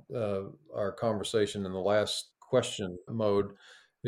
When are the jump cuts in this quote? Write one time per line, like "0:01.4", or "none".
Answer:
0:03.1